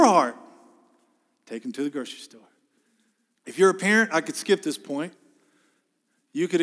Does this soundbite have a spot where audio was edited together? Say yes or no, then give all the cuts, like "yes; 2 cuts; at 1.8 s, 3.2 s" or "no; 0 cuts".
yes; 1 cut; at 3.4 s